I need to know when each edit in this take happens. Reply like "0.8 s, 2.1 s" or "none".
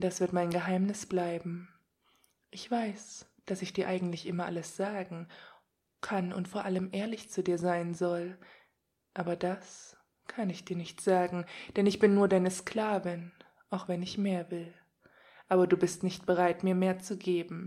none